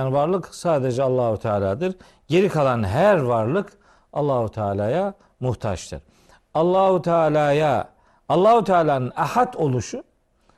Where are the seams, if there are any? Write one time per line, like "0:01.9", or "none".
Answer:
none